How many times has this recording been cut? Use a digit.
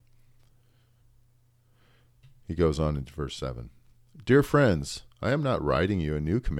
0